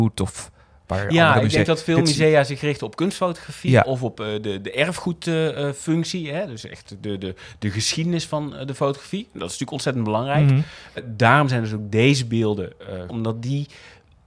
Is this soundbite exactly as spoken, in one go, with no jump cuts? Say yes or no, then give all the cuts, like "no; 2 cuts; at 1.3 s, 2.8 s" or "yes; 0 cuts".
no; 2 cuts; at 11.0 s, 13.1 s